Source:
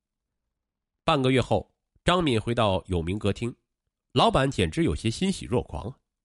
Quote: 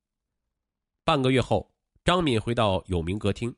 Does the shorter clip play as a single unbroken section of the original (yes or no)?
yes